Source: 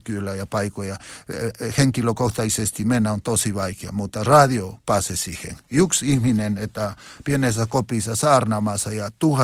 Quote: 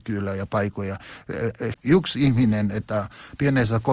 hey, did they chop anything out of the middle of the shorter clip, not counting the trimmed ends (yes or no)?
yes